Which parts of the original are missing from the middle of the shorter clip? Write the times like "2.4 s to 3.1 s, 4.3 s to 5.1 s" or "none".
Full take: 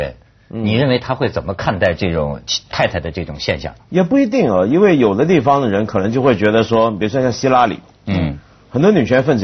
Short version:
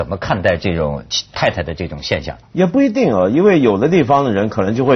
none